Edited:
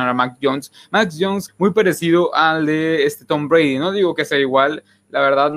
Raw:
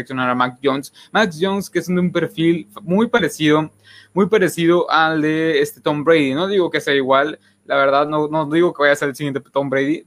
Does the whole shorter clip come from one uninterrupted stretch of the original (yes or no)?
no